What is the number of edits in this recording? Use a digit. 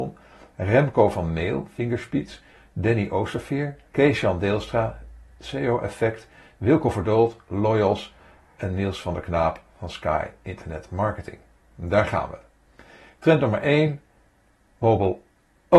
1